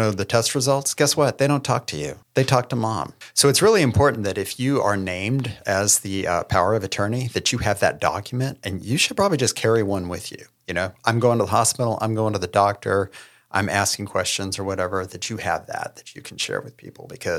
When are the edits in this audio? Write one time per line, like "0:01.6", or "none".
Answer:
0:02.2